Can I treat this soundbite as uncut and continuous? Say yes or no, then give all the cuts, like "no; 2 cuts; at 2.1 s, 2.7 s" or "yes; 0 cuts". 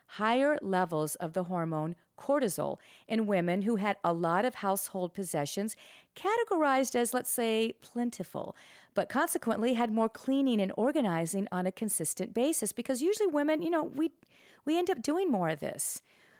yes; 0 cuts